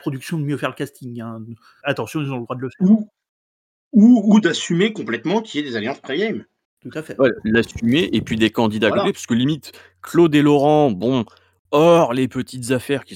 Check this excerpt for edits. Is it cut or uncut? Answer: cut